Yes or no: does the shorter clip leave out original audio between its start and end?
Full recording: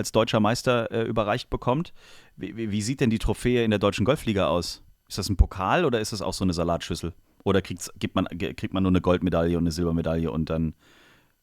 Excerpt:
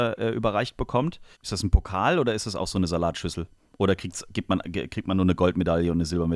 yes